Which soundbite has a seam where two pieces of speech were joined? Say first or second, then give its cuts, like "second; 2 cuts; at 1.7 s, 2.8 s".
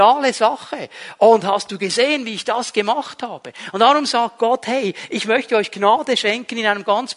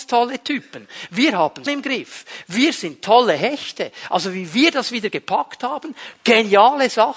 second; 1 cut; at 1.7 s